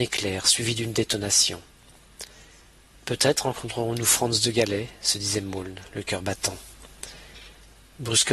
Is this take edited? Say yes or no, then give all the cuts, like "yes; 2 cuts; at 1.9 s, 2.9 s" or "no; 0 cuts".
yes; 1 cut; at 2.9 s